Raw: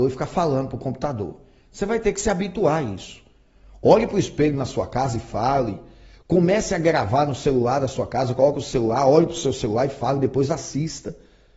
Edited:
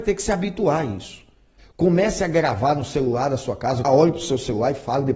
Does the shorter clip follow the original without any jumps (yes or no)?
no